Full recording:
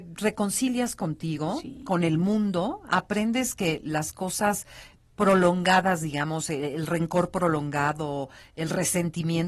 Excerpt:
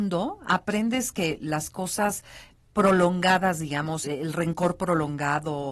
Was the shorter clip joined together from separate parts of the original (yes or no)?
yes